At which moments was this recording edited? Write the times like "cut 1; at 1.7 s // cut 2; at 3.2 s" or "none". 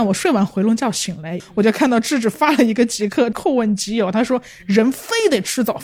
cut 1; at 1.4 s // cut 2; at 3.3 s